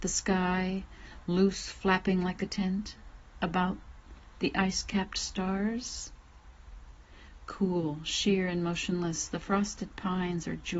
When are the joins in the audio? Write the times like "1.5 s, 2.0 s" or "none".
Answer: none